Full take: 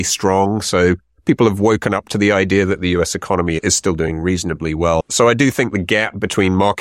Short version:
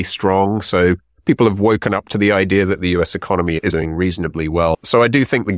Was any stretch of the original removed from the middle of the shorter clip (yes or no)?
yes